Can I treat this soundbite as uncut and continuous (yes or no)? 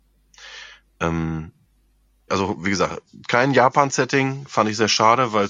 no